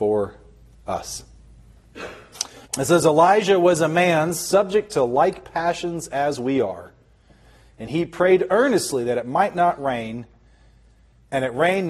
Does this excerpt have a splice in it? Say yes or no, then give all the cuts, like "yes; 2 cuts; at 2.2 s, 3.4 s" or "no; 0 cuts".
yes; 1 cut; at 2.6 s